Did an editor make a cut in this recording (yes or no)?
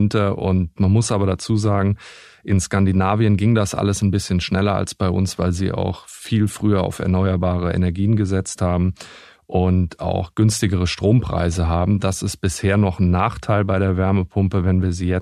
no